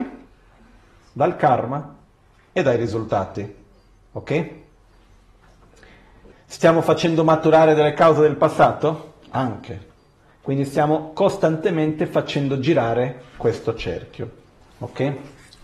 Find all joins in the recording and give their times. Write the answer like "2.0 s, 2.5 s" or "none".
6.3 s, 9.2 s